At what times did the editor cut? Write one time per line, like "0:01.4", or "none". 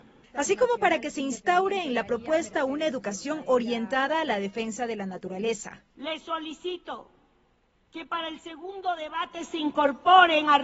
none